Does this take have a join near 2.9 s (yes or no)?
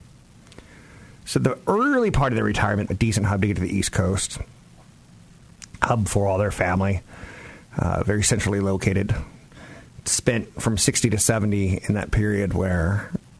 yes